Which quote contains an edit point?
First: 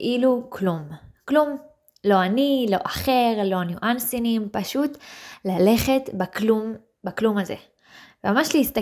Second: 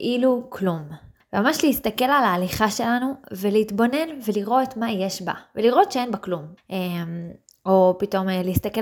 second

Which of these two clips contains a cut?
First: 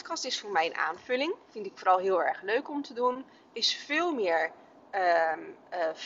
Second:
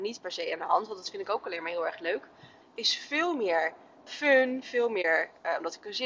second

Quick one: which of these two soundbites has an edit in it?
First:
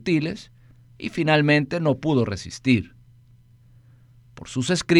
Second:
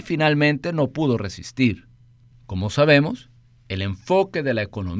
second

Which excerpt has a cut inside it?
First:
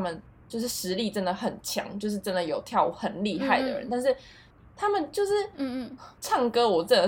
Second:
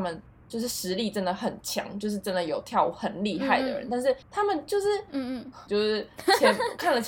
second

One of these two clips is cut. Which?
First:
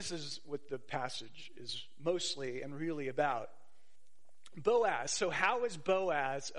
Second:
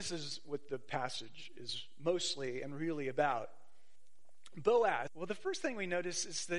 second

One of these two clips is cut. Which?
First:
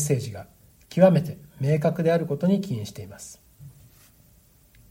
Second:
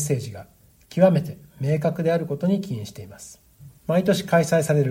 second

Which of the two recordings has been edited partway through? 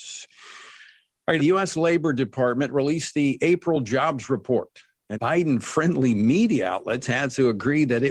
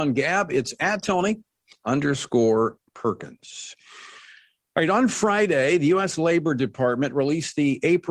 first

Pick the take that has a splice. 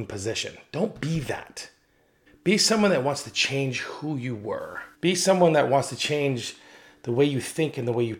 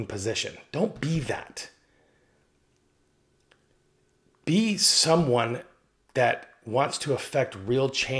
first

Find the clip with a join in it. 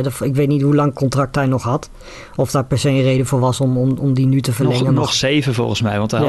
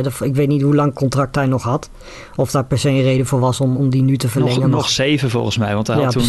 second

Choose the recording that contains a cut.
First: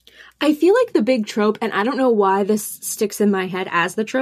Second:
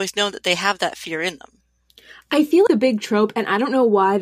second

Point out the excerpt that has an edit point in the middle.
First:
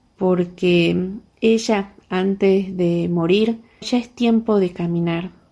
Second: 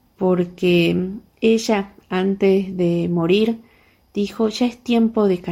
first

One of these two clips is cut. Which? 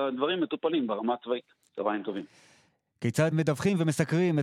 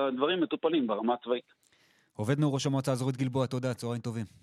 first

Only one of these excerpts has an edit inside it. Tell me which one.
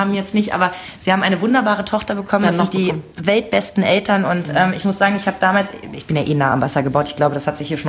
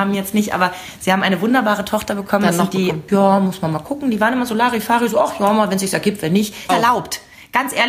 second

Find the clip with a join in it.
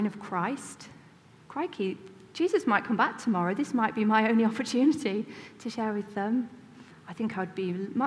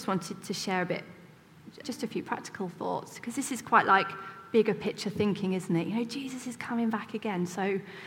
second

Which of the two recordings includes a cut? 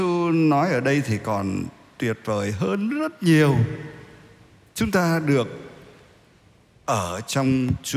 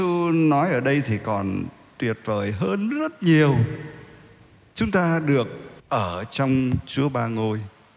second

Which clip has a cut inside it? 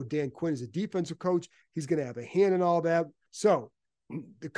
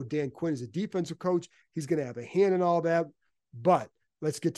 first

